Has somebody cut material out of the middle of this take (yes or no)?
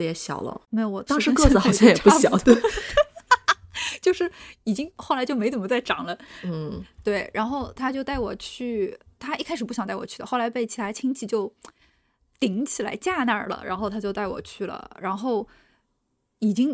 yes